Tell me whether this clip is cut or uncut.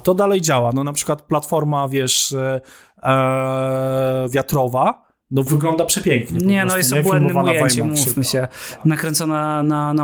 uncut